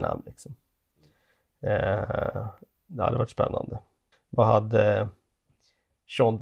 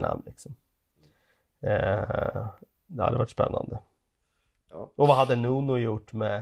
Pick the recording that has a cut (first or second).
first